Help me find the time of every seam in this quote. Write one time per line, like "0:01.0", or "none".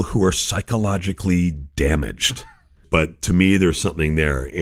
0:02.8